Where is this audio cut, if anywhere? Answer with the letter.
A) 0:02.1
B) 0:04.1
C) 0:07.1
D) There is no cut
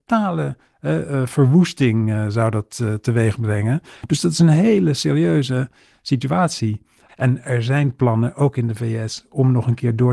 C